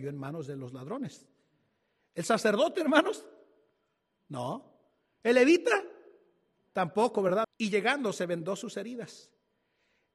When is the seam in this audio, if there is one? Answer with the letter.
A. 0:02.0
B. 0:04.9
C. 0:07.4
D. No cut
C